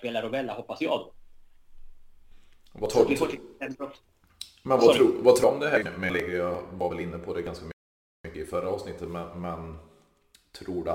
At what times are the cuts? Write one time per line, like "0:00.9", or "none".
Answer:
0:05.8

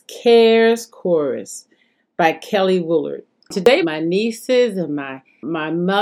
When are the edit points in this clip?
0:03.8

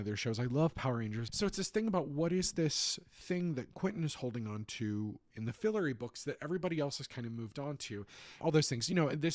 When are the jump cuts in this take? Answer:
0:01.3
0:08.4

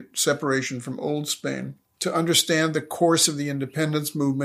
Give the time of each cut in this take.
0:01.9

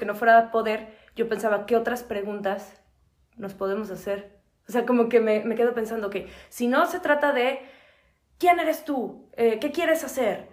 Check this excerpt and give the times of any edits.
none

